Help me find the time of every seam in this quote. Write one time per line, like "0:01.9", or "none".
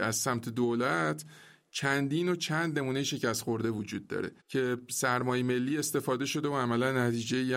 0:04.4